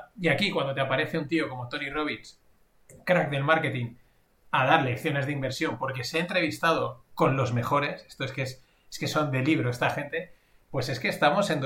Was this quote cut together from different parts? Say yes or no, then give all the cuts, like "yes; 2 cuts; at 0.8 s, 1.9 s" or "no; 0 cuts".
no; 0 cuts